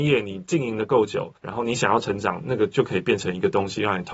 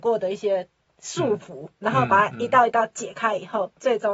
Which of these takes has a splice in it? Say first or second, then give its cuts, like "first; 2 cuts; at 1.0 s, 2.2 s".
first; 1 cut; at 1.4 s